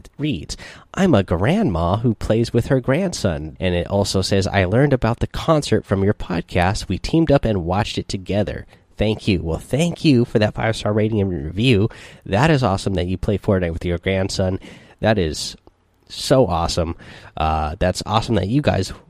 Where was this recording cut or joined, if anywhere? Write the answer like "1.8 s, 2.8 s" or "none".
3.6 s

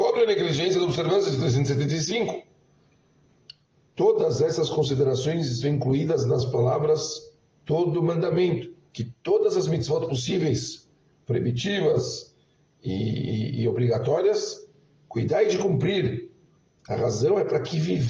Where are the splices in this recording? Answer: 8.9 s

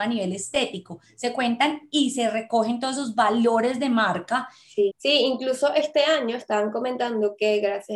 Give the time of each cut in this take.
4.9 s

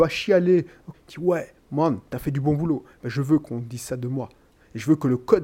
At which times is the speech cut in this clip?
0.9 s

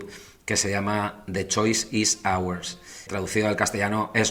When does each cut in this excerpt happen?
3.1 s

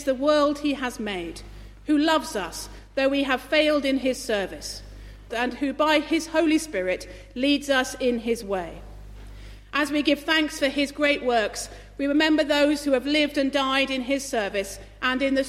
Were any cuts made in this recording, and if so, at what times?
5.3 s

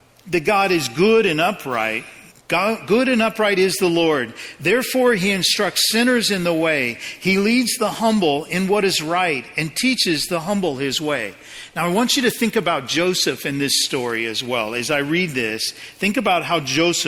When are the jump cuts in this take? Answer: 2.3 s

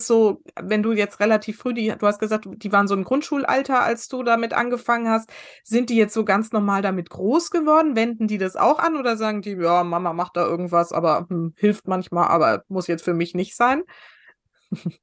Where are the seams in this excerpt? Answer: none

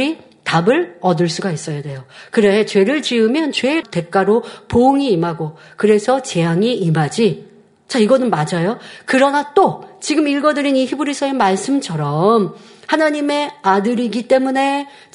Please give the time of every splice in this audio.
none

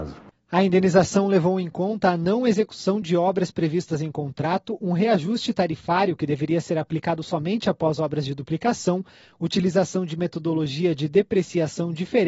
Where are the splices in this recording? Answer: none

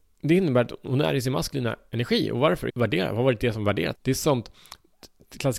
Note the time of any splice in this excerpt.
2.7 s, 3.9 s

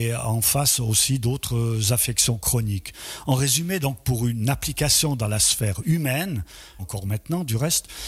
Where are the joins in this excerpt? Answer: 6.8 s

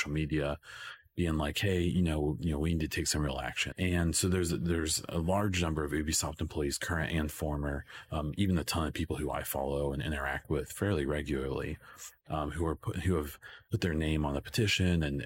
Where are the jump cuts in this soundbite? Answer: 3.7 s

